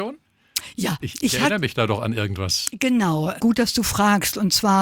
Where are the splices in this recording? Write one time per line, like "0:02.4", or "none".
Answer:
0:03.4